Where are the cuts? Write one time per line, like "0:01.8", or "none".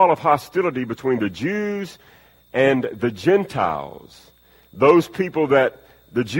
none